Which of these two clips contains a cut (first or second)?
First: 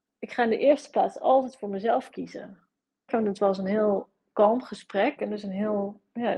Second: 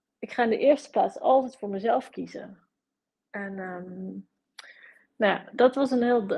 first